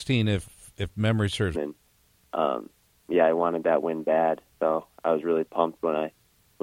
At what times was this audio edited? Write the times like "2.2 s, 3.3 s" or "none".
1.5 s